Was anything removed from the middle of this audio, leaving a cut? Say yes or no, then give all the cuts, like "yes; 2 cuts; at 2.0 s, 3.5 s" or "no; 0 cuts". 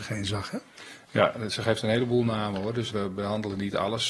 yes; 1 cut; at 2.9 s